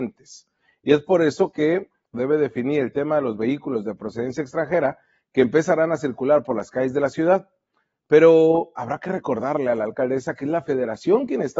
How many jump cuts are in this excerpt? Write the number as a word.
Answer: one